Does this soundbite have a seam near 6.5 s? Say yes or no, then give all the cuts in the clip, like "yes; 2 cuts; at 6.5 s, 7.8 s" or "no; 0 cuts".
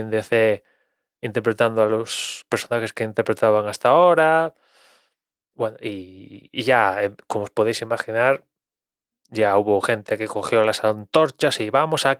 yes; 1 cut; at 6.5 s